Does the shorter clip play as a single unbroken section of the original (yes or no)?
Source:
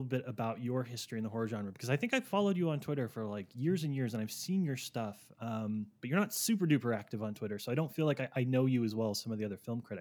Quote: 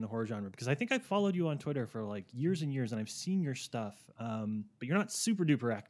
yes